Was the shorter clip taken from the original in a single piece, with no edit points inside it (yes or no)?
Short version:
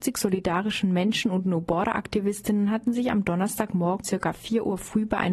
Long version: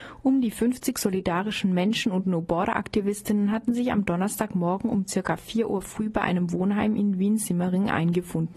no